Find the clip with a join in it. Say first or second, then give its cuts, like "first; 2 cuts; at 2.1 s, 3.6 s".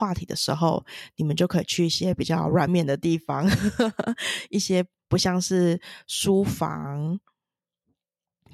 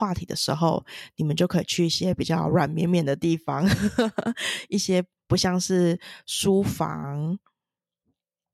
first; 1 cut; at 2.7 s